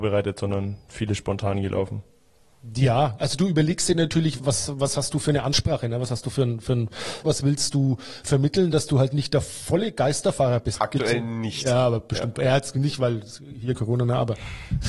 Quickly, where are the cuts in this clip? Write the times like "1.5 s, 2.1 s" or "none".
4.4 s, 7.2 s, 10.8 s